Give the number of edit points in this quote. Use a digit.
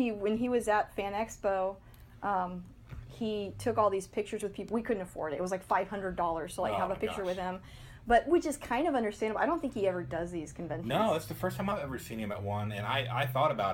0